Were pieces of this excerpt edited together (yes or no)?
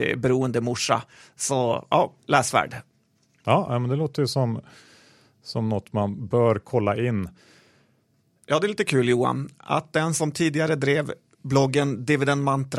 yes